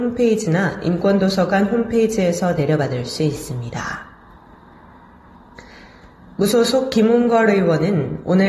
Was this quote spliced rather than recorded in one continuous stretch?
no; 0 cuts

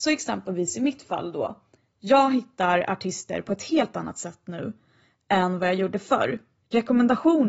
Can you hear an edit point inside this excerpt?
no; 0 cuts

